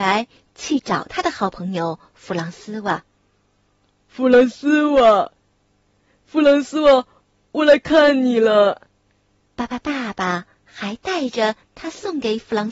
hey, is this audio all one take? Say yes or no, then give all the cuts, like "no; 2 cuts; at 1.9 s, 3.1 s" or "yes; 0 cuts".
no; 1 cut; at 9.4 s